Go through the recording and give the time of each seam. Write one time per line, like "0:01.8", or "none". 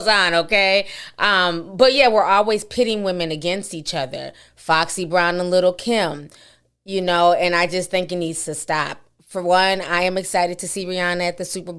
none